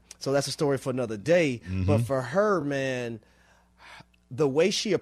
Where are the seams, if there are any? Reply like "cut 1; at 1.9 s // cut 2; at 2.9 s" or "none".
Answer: none